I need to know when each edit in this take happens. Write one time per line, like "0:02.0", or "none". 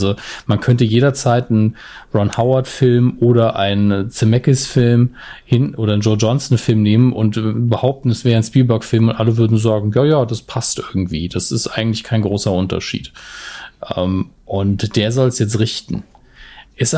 none